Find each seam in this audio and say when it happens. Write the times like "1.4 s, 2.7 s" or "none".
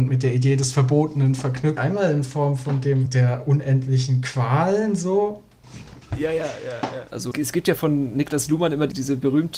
3.1 s, 5.6 s, 7.1 s